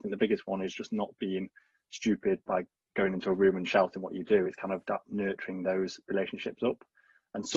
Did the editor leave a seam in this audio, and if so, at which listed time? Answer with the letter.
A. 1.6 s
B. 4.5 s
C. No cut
C